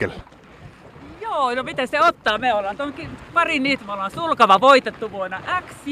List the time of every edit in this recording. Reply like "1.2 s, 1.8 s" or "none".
3.8 s